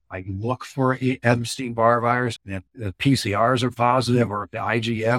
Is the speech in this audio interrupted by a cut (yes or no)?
yes